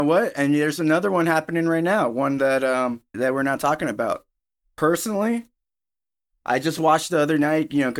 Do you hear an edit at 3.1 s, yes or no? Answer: yes